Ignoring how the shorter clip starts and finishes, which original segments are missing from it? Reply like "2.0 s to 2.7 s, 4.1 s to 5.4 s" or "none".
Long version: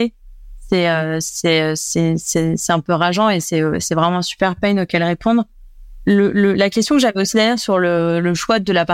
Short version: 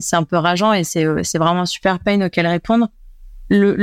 none